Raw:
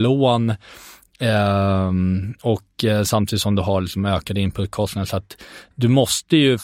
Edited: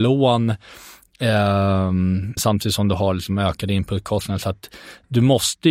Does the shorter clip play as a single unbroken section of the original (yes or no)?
no